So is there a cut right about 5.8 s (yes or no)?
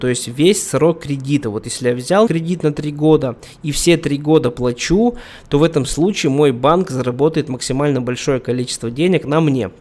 no